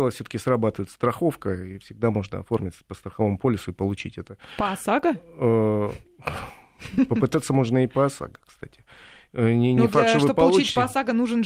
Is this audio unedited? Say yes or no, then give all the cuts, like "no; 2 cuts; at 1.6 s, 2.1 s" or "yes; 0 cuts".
yes; 0 cuts